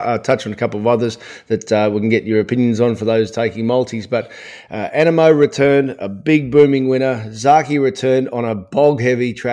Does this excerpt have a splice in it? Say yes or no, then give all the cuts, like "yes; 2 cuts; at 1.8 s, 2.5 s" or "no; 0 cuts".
no; 0 cuts